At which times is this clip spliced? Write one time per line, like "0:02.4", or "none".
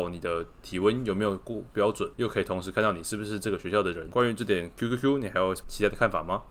none

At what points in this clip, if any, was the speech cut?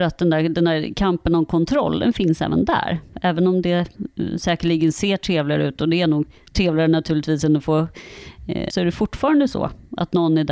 0:08.7

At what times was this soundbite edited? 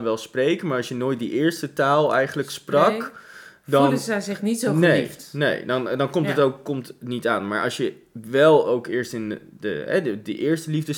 none

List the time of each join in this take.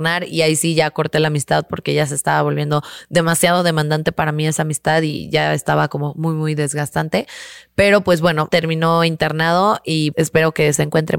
0:08.5
0:10.1

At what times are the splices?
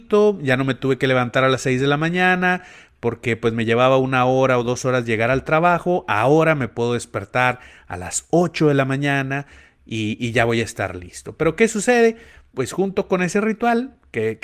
0:12.5

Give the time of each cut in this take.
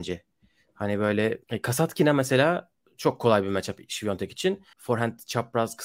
0:01.4
0:04.7

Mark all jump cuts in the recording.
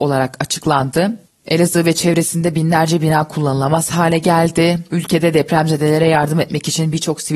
none

